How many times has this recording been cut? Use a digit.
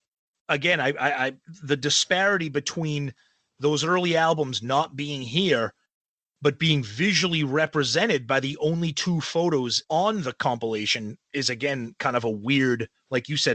1